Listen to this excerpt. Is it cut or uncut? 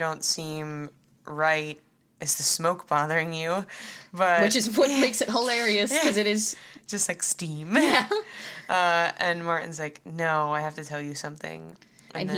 uncut